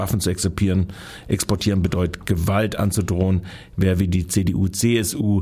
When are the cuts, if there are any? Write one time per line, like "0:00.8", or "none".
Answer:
none